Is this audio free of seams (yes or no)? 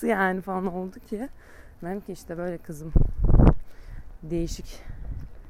yes